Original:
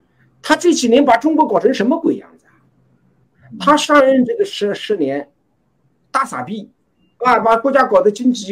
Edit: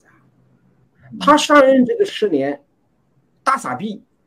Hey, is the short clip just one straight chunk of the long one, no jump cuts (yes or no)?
no